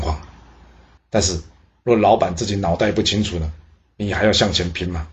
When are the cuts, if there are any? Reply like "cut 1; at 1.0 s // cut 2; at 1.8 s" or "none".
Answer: cut 1; at 1.0 s